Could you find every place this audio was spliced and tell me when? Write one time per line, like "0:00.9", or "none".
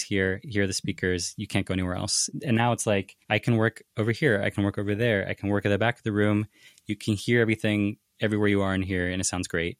none